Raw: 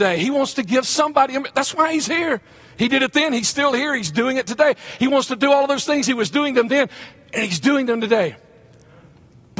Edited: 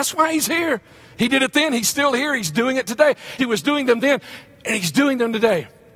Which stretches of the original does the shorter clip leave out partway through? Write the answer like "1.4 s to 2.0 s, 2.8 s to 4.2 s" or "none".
5.0 s to 6.1 s